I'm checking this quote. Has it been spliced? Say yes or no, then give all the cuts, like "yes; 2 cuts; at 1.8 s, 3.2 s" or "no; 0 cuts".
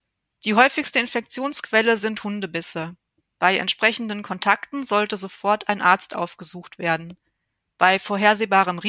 no; 0 cuts